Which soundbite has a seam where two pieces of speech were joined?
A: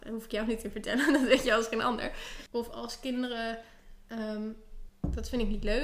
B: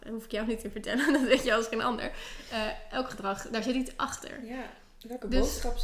A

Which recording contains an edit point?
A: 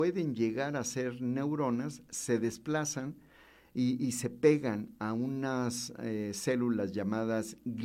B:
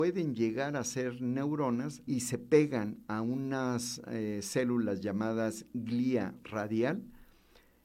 B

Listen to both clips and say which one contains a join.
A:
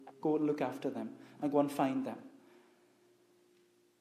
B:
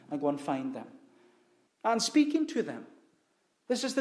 B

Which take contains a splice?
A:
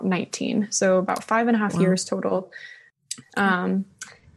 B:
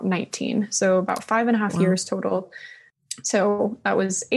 A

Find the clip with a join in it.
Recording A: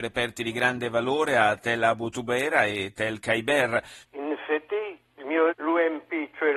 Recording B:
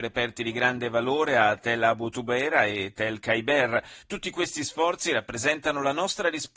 A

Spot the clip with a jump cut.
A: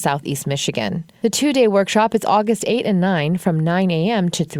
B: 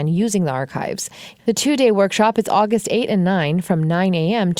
B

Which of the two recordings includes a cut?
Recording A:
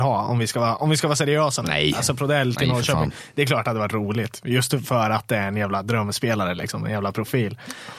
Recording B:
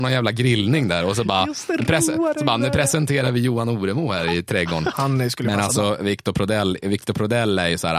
B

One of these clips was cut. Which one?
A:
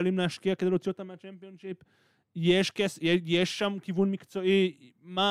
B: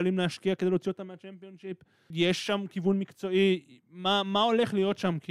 B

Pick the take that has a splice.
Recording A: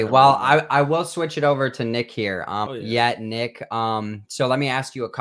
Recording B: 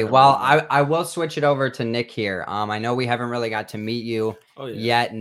A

